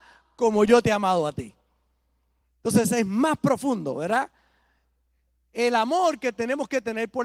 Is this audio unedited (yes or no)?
yes